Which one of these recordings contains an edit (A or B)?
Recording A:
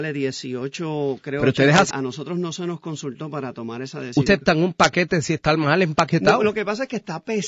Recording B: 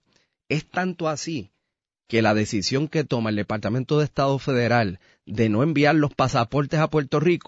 A